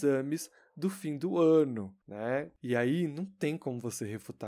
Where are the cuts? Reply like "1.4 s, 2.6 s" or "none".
2.6 s